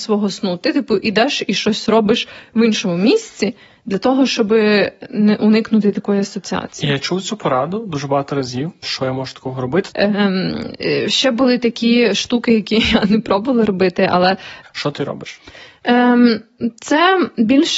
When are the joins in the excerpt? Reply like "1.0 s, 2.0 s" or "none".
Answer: 8.8 s, 9.9 s, 14.6 s